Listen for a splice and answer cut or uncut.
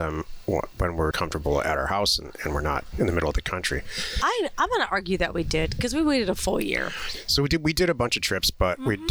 cut